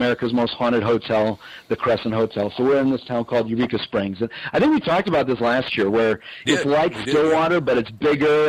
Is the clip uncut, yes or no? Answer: no